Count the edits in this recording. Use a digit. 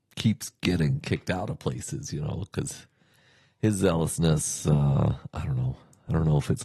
0